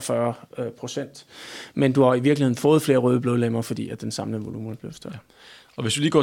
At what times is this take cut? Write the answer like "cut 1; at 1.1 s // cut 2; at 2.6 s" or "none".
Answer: none